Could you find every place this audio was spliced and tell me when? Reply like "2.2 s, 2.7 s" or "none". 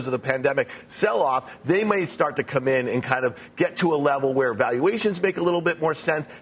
none

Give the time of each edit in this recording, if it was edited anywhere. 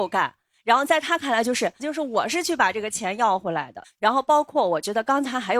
1.8 s, 3.8 s

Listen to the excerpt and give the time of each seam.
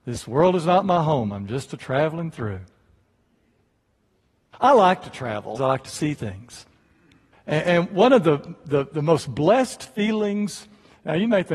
4.5 s, 5.6 s, 7.3 s

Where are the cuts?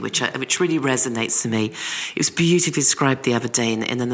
none

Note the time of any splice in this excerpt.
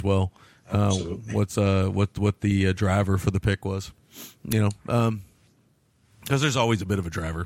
none

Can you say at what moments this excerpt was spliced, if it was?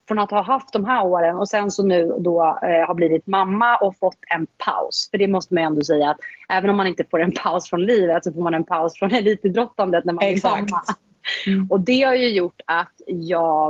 none

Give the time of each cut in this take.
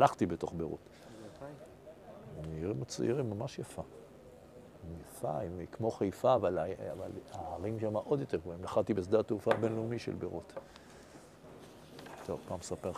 none

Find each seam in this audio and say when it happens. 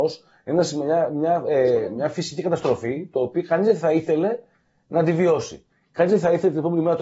none

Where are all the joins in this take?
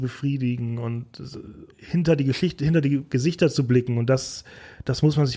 1.7 s

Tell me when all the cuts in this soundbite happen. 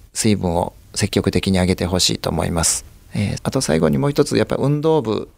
3.4 s

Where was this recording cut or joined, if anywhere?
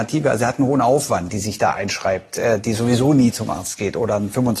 1.3 s

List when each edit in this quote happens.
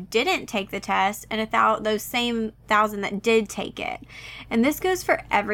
4.4 s

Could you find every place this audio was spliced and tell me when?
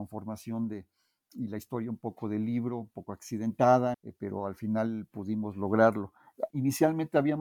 3.9 s, 6.5 s

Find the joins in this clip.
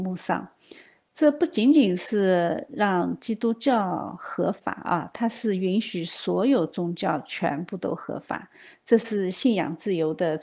none

